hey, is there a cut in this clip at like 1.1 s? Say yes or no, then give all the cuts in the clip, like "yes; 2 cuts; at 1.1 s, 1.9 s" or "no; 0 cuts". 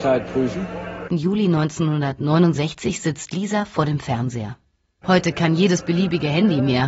yes; 2 cuts; at 1.1 s, 5.0 s